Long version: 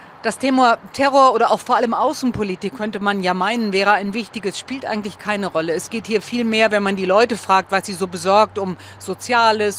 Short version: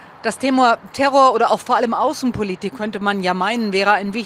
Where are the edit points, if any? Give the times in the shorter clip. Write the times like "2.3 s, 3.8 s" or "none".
none